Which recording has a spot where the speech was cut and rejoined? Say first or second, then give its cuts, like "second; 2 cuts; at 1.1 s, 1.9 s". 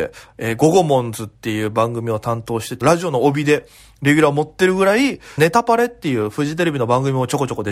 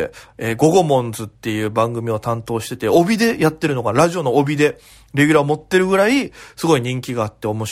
first; 2 cuts; at 2.8 s, 5.4 s